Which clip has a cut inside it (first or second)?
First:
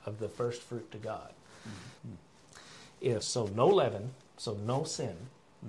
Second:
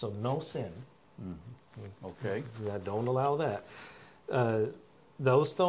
first